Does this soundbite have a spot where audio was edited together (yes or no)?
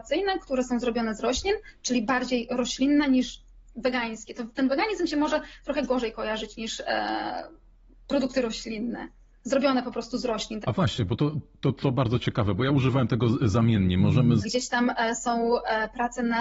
yes